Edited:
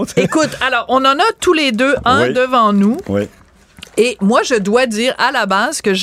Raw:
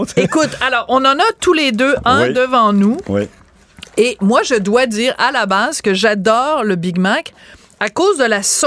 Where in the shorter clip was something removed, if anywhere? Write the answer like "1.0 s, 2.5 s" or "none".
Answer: none

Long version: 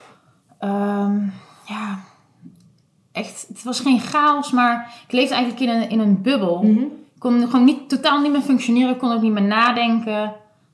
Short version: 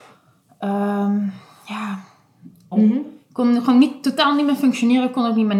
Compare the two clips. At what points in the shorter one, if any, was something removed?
2.7 s

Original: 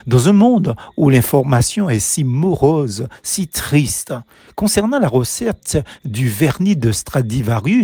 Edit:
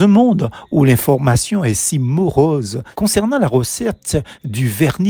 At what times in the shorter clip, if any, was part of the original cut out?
3.0 s

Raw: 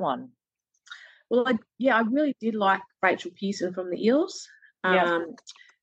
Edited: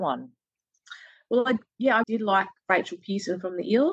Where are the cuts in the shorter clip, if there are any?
2.0 s

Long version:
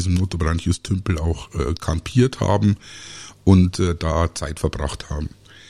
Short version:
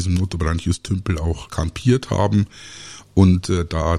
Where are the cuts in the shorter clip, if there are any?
1.5 s

